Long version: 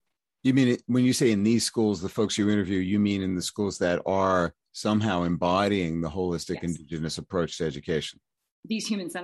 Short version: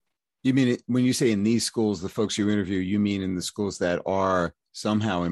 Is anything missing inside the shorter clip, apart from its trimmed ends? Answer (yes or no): no